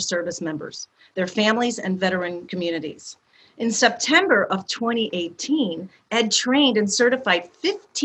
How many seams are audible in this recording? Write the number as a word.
zero